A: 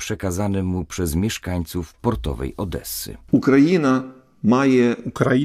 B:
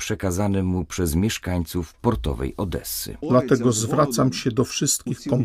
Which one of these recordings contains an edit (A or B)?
B